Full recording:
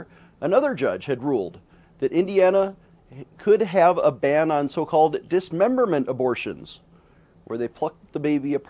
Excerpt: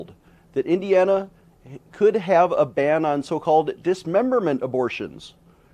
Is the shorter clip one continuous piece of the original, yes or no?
yes